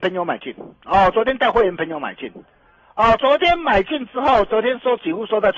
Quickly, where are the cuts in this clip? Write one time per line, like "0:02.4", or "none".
none